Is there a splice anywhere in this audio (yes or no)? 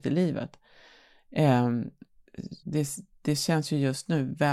yes